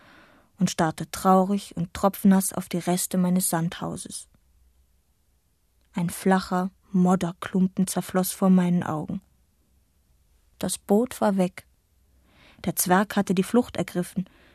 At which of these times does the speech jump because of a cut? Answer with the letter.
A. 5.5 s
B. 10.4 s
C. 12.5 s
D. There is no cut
D